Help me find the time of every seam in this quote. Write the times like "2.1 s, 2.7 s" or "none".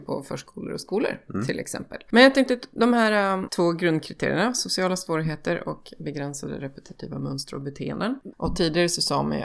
2.1 s, 8.3 s

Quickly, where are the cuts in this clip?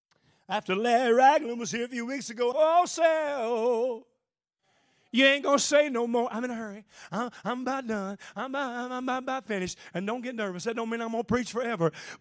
2.5 s

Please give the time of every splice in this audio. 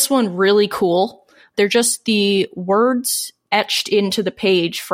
1.5 s, 3.5 s

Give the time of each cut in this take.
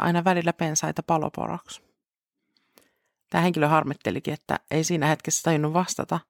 none

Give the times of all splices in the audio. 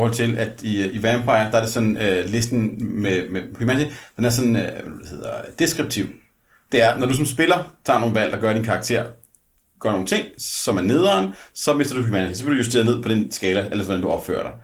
none

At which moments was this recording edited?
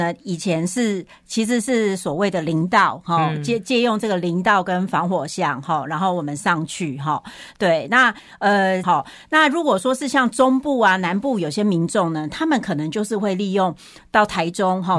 8.8 s

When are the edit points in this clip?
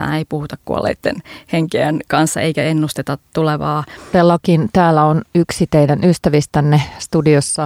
4.1 s

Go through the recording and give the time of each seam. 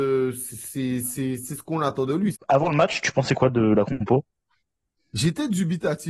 2.3 s

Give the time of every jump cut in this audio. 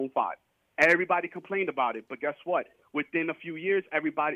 none

